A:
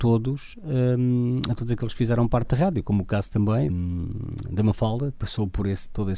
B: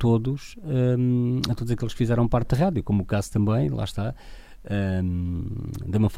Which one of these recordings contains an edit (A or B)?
A